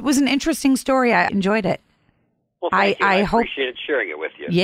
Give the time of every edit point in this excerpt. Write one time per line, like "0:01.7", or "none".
0:01.3